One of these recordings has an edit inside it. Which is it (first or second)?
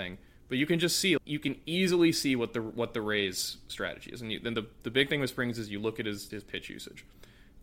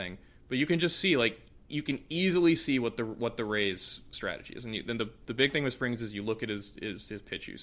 first